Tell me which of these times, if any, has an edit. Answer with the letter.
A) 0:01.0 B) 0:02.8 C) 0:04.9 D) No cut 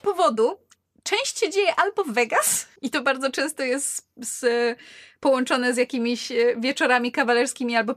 B